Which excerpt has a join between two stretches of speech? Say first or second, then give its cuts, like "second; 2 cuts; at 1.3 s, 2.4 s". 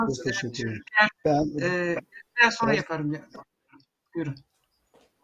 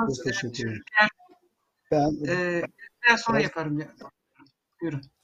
first; 1 cut; at 1.2 s